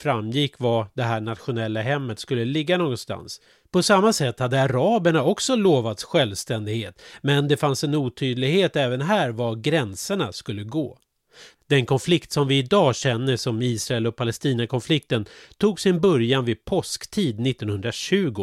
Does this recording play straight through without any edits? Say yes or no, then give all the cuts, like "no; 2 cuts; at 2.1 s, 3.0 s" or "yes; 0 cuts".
yes; 0 cuts